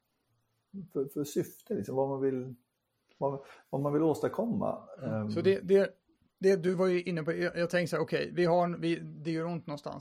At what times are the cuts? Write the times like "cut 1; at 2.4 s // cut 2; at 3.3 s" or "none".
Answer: none